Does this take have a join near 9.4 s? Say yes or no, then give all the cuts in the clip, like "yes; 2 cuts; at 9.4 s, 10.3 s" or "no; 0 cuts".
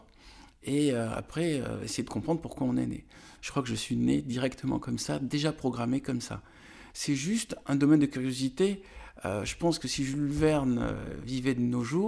no; 2 cuts; at 3.4 s, 6.9 s